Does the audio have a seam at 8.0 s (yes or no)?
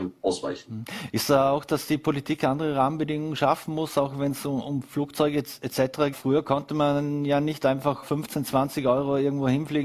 yes